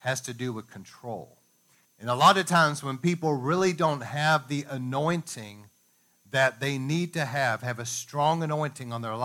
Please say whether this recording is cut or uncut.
cut